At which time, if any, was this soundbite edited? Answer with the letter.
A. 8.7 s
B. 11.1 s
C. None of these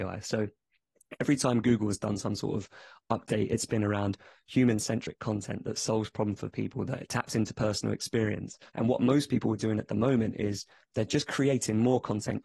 A